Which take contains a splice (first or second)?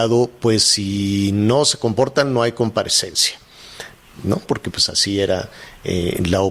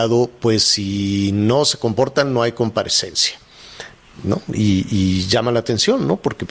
first